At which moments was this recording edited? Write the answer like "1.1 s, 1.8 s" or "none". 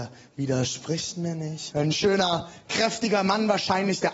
1.7 s